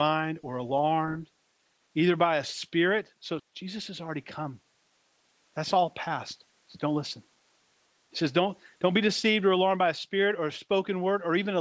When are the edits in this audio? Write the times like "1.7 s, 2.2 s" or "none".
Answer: 3.4 s